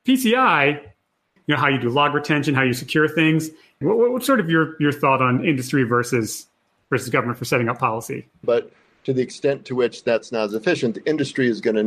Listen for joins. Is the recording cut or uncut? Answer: cut